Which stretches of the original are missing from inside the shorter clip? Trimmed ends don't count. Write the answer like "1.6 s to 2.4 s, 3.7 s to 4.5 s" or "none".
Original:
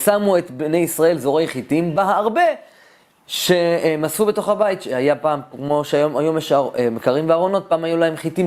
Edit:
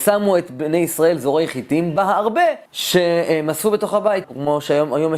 2.7 s to 3.2 s, 4.8 s to 5.5 s